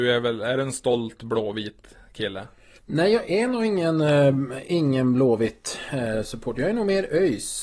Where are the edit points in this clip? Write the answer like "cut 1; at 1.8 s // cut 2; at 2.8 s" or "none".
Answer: none